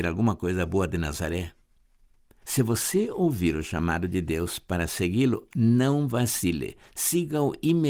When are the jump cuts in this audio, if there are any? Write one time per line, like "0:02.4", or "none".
0:02.4